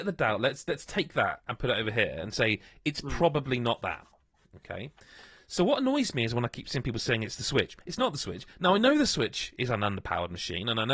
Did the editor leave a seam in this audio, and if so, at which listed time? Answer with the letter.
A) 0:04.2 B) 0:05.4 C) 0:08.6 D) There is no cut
D